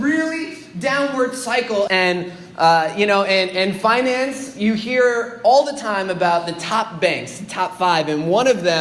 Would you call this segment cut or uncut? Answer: cut